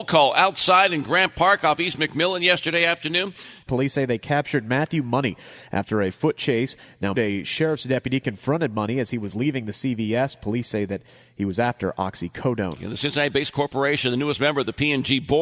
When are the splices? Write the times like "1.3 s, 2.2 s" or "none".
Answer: 3.7 s, 7.1 s, 12.8 s